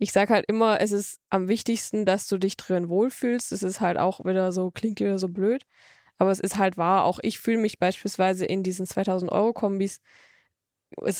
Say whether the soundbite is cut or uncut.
uncut